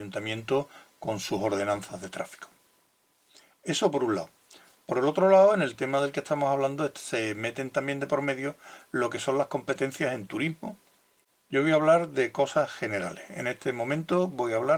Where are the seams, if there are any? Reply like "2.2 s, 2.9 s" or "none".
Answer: none